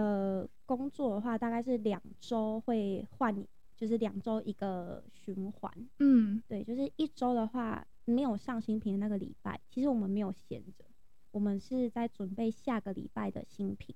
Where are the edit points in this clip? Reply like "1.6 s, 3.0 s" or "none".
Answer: none